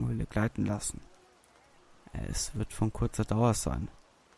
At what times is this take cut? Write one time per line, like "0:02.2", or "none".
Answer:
none